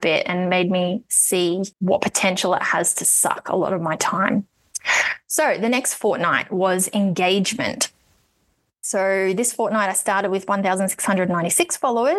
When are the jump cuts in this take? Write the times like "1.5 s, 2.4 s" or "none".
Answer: 1.7 s